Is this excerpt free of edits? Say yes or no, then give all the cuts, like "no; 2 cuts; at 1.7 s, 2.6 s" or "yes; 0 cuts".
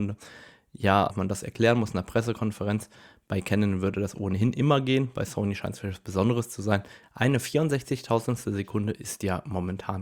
no; 2 cuts; at 1.1 s, 7.0 s